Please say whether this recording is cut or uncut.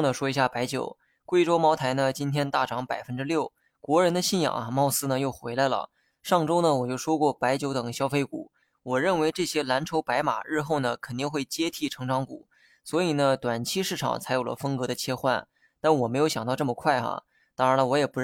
uncut